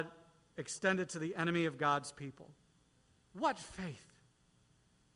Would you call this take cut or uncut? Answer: cut